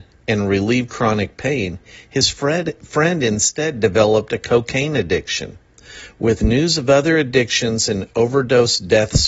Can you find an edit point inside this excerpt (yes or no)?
no